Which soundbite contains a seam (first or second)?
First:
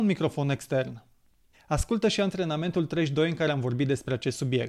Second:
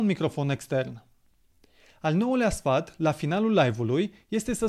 first